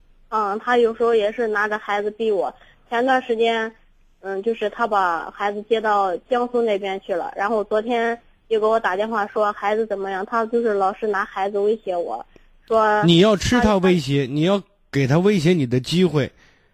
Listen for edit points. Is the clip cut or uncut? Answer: uncut